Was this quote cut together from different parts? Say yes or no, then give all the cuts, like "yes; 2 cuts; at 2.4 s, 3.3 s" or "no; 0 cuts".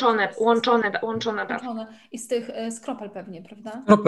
no; 0 cuts